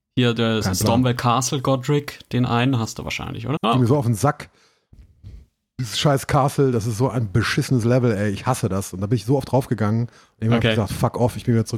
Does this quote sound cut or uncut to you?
cut